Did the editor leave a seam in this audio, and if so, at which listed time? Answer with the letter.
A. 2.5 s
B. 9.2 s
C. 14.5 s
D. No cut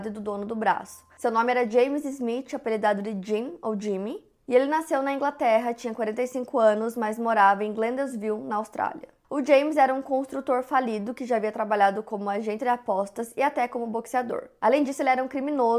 D